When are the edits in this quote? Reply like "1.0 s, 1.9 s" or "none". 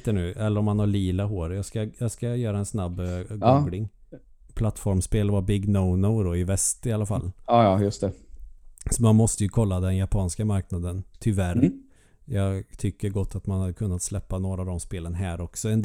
4.5 s